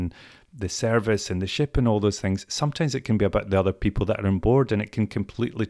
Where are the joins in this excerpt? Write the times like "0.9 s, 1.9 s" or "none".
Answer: none